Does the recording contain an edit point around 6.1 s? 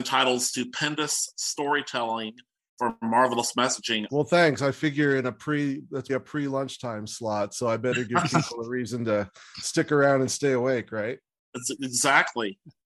yes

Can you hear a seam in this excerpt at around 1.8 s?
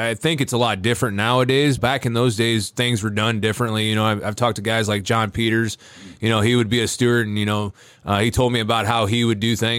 yes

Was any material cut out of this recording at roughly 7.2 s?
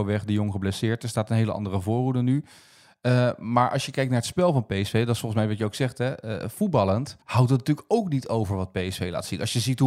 yes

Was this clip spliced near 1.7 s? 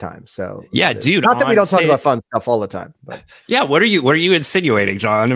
no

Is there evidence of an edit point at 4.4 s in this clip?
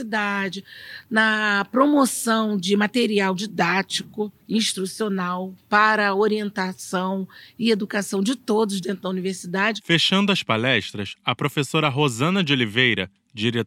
yes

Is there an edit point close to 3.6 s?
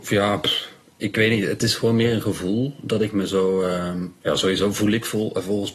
no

